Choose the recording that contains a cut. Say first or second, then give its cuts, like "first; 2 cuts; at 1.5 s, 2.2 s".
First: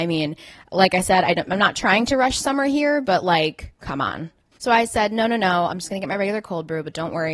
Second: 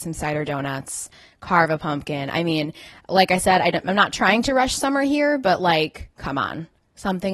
first; 1 cut; at 4.5 s